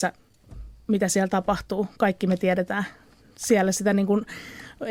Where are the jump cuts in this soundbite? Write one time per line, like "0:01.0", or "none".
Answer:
none